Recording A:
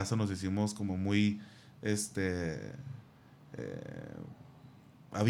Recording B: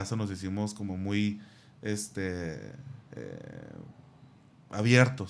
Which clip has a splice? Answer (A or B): B